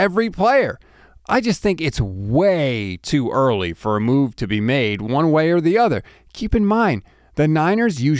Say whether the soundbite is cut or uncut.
uncut